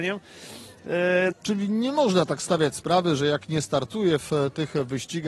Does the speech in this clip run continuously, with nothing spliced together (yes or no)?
no